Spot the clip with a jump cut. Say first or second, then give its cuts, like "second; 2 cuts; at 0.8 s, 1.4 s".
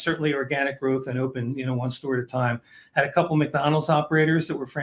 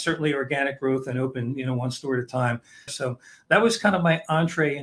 second; 1 cut; at 2.9 s